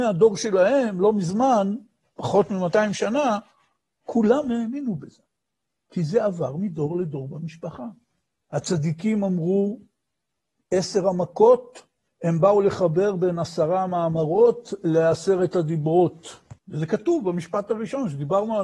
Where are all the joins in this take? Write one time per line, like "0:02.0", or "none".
0:08.4
0:16.6